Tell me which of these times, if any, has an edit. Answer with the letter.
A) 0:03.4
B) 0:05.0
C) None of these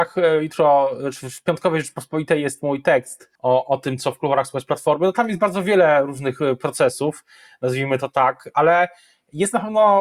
A